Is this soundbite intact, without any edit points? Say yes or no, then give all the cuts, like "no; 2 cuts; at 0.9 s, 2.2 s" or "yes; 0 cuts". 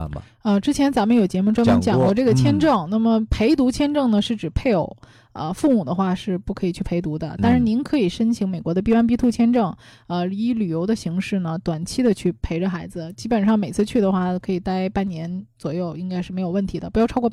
yes; 0 cuts